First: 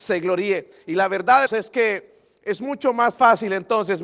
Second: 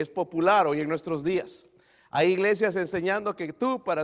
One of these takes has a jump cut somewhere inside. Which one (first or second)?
first